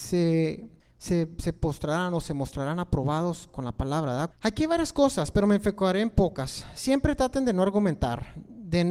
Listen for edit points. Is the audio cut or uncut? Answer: cut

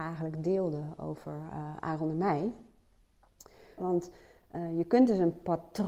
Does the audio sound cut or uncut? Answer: cut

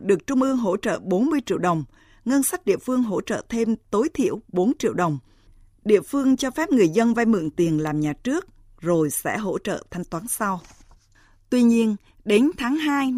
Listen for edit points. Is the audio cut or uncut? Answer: uncut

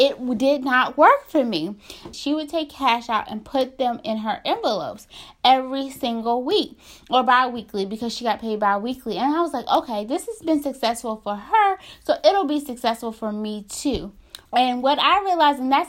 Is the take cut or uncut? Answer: cut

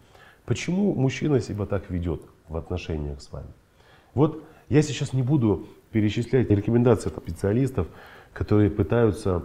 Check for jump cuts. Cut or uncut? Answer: cut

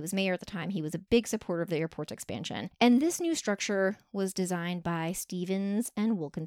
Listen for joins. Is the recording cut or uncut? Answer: uncut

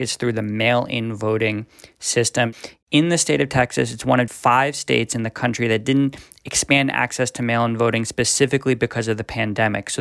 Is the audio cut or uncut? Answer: cut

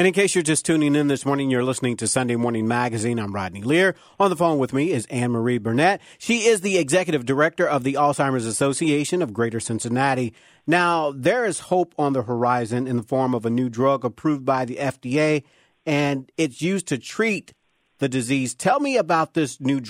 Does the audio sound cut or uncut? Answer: uncut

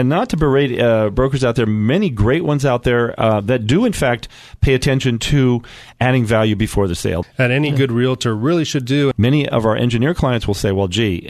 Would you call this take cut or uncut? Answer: cut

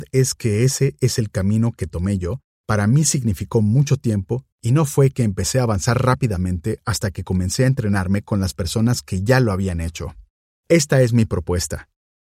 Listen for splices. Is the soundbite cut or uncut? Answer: cut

